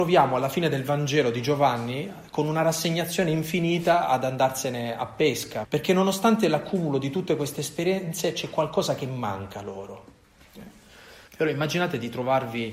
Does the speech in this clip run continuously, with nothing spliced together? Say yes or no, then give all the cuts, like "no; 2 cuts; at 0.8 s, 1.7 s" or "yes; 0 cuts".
no; 2 cuts; at 5.6 s, 11.3 s